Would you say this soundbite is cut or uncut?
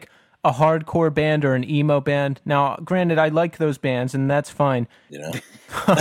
cut